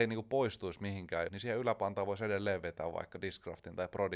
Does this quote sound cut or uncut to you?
cut